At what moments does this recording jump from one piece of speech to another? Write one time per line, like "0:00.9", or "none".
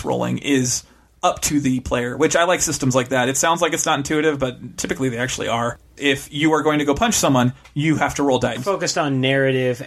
0:06.0
0:08.6